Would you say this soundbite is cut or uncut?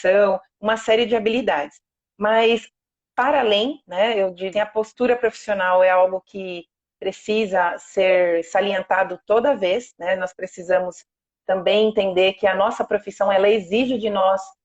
cut